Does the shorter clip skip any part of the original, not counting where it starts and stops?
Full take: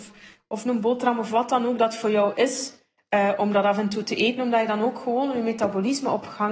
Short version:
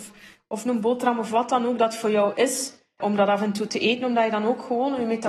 yes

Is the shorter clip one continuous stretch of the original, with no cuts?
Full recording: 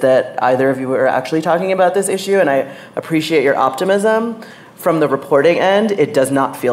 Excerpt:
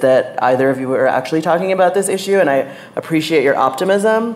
yes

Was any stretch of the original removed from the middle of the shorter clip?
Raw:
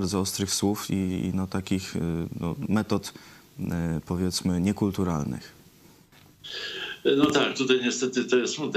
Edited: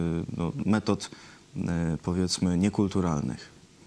no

